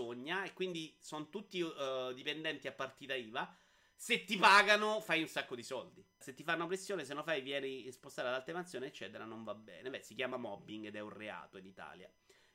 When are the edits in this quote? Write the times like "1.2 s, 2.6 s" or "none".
6.2 s